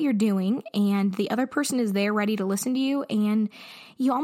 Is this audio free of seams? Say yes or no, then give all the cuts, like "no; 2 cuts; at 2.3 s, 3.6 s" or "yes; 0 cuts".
yes; 0 cuts